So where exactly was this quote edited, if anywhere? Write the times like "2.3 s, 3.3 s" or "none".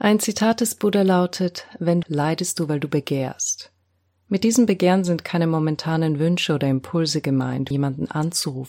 2.0 s, 7.7 s